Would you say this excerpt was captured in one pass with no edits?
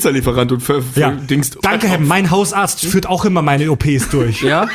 no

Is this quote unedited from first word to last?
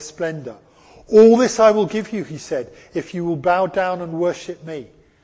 yes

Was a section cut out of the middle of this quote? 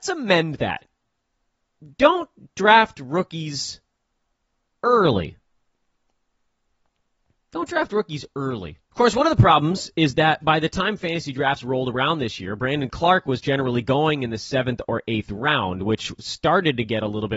yes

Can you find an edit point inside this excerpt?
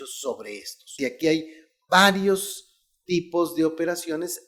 yes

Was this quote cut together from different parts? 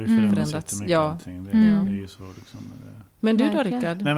no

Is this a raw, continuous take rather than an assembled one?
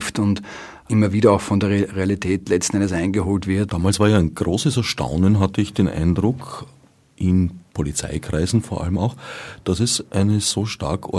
no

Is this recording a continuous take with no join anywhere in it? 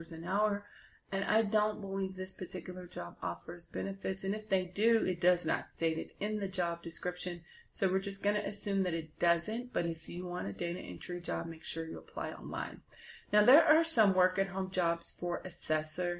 yes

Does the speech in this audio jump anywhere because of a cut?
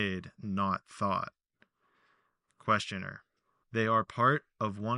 yes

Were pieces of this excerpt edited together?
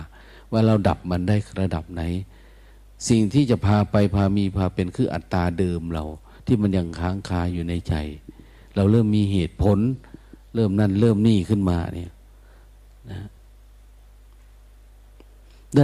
no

